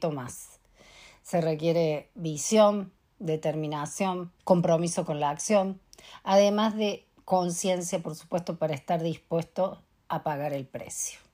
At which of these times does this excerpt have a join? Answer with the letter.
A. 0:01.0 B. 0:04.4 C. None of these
B